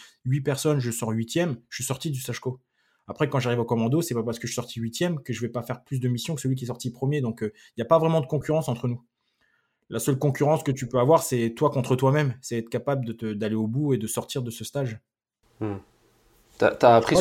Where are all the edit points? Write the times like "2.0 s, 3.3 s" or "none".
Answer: none